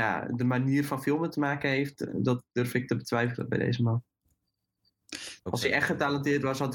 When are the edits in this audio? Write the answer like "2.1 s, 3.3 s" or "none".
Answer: 5.4 s